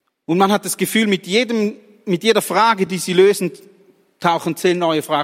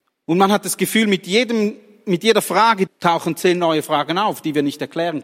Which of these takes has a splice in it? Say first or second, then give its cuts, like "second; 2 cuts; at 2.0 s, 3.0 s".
second; 1 cut; at 2.9 s